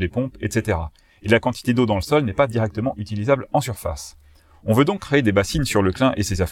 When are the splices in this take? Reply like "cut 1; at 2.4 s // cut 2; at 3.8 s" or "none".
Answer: none